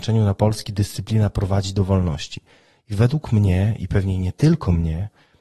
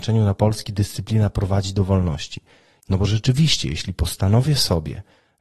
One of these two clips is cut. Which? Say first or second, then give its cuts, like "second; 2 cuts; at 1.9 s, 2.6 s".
second; 1 cut; at 2.8 s